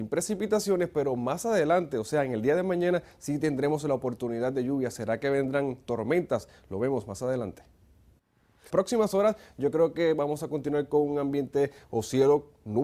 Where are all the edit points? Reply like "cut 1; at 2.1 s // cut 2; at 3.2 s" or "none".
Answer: cut 1; at 8.7 s

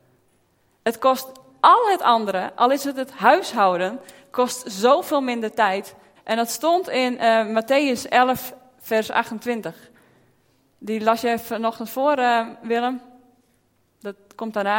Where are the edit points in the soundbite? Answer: cut 1; at 6.2 s

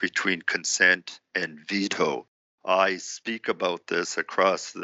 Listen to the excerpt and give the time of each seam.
cut 1; at 2.5 s

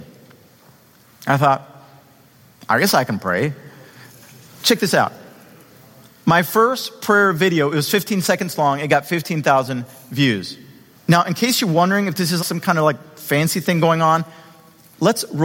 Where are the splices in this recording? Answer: cut 1; at 4.5 s // cut 2; at 10.9 s // cut 3; at 12.4 s

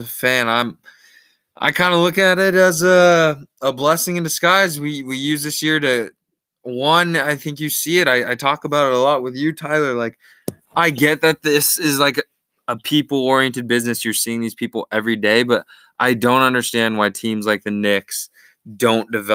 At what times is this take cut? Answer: none

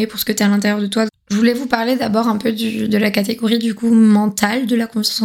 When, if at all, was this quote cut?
cut 1; at 1.1 s

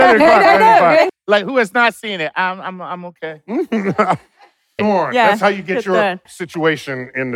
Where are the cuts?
cut 1; at 1.1 s // cut 2; at 4.8 s // cut 3; at 6.3 s

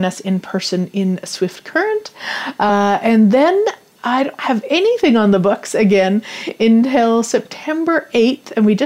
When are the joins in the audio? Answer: none

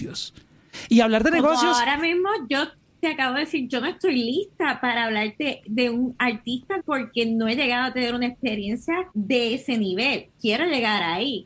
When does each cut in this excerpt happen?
cut 1; at 6.8 s // cut 2; at 9.1 s

